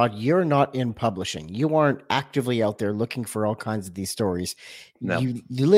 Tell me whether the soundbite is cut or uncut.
uncut